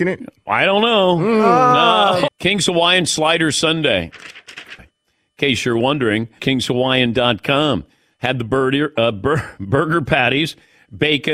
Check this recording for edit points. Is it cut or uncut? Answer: cut